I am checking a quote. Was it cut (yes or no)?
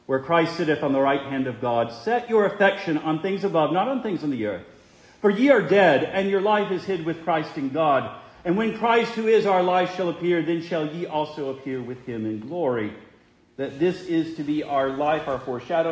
no